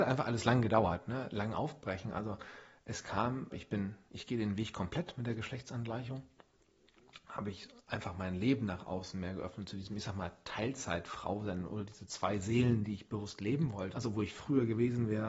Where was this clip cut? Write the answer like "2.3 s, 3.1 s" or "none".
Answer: 3.5 s, 13.9 s